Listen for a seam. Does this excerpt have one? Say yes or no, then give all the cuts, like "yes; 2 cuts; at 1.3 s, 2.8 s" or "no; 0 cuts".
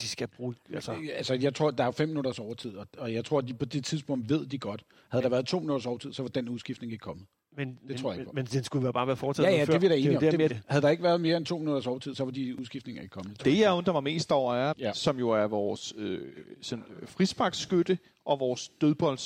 yes; 2 cuts; at 10.5 s, 14.7 s